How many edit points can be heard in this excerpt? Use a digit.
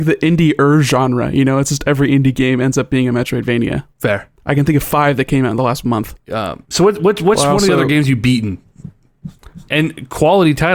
2